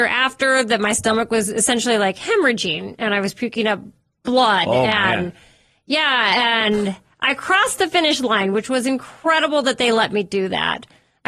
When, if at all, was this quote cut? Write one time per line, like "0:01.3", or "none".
none